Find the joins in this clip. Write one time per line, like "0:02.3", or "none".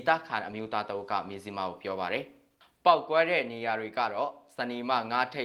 none